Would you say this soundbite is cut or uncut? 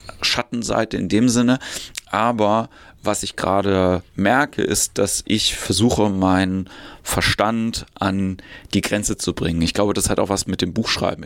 uncut